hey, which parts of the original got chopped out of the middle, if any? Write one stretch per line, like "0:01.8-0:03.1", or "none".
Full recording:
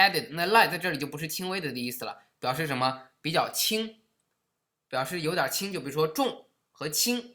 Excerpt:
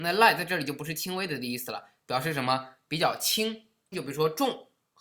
0:04.3-0:05.7